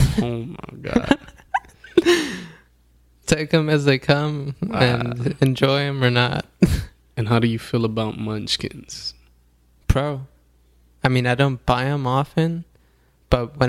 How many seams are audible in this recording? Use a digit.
1